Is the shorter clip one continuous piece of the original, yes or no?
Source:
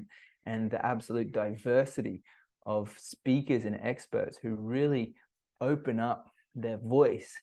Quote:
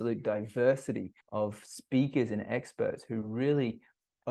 no